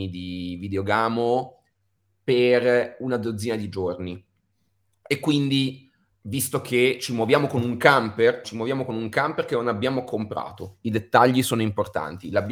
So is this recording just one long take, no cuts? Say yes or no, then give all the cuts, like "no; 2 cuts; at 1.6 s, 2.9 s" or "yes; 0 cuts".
no; 1 cut; at 8.4 s